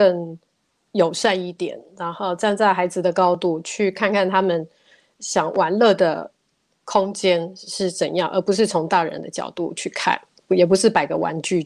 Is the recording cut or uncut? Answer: uncut